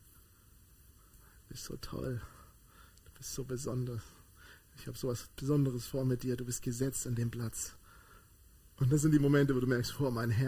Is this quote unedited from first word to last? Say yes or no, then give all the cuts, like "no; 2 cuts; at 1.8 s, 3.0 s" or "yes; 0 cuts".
yes; 0 cuts